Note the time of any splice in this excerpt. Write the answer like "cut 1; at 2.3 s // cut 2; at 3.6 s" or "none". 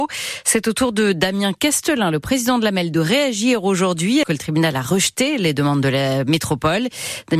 cut 1; at 4.2 s